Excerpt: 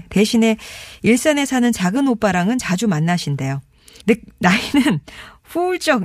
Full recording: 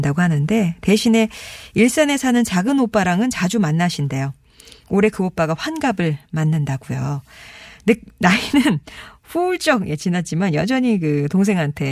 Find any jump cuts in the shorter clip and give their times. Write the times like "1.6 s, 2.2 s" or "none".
4.0 s